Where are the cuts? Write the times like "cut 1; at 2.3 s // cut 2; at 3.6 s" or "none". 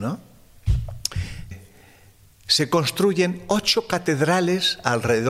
cut 1; at 1.5 s